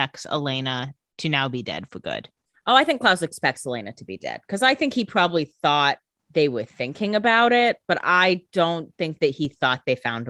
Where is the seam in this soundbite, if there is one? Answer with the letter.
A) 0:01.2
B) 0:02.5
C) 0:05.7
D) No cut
D